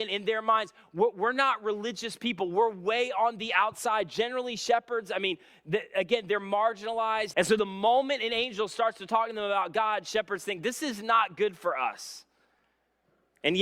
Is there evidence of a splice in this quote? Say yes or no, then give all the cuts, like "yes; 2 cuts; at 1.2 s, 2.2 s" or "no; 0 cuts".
yes; 1 cut; at 7.3 s